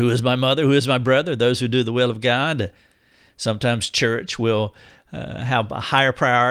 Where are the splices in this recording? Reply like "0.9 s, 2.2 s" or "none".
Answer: none

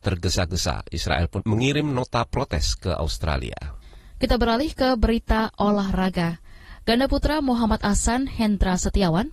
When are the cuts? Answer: 1.4 s

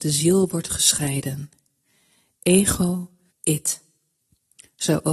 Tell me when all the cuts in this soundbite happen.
3.3 s

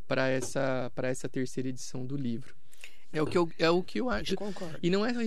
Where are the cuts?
3.1 s, 4.3 s

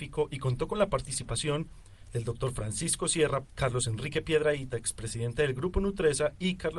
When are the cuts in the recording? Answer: 3.4 s

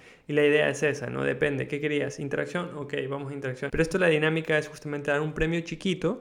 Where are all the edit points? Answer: 3.7 s

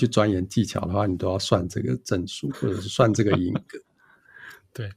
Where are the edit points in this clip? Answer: none

